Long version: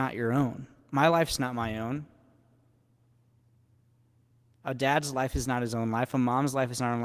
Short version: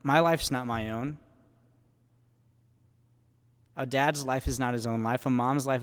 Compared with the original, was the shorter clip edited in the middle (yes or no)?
no